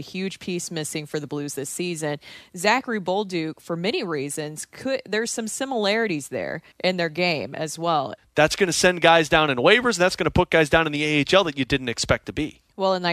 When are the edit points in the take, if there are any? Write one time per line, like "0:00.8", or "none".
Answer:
0:06.7
0:08.2